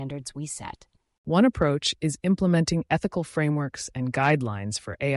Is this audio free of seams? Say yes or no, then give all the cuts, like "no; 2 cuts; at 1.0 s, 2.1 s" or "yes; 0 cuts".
yes; 0 cuts